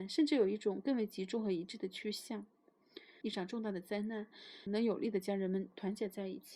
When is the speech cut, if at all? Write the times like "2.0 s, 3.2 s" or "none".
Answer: 3.2 s, 4.7 s